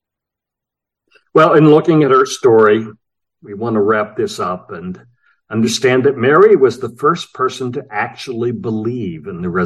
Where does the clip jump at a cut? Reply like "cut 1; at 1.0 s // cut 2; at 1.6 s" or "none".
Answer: none